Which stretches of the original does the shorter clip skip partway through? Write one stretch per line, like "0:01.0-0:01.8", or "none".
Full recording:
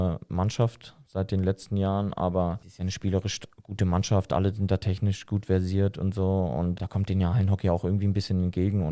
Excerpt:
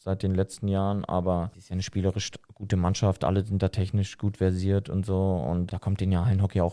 none